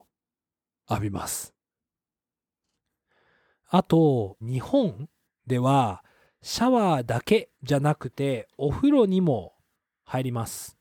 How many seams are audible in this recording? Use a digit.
2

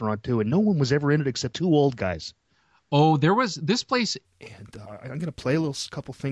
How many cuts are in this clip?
2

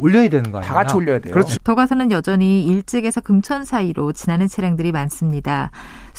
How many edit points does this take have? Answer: 1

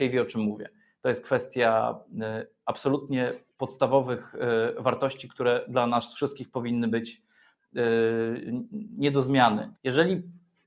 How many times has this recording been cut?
1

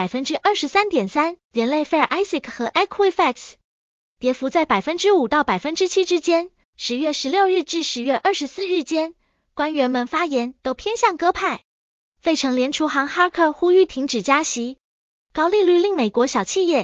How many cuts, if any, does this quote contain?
1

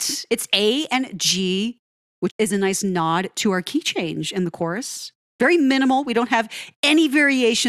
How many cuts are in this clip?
1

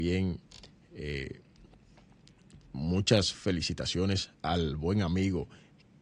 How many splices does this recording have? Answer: 1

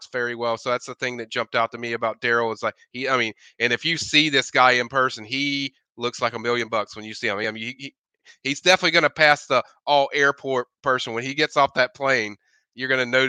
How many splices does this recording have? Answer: 0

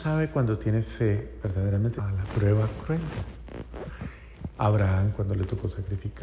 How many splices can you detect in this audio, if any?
2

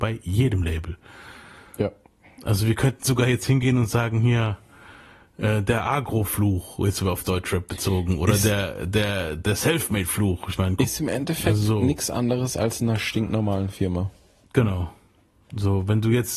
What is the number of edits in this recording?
0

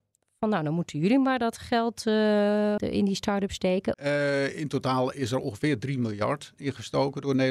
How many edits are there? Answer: 2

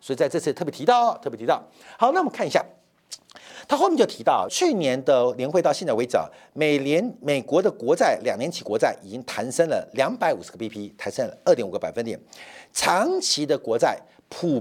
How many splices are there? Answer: 1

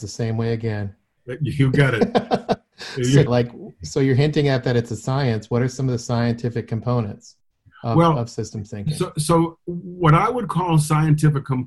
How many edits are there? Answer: 1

